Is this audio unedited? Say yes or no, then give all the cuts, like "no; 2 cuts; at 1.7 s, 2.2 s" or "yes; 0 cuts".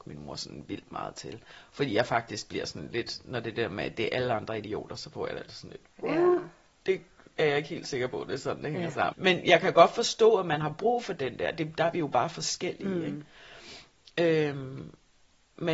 no; 1 cut; at 9.1 s